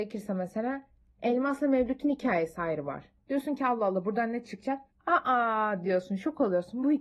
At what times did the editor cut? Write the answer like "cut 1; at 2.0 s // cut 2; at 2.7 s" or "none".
cut 1; at 3.2 s // cut 2; at 4.9 s